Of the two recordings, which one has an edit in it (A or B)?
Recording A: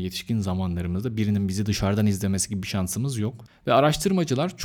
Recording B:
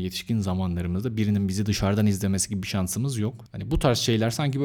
A